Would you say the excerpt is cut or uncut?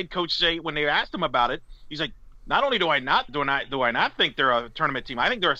cut